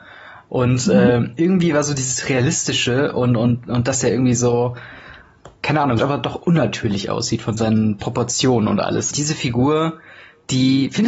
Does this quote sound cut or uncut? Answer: cut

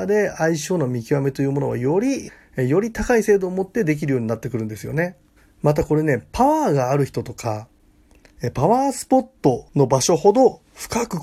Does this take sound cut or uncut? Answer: cut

